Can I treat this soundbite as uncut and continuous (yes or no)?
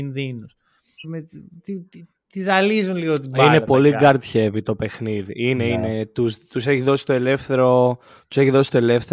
no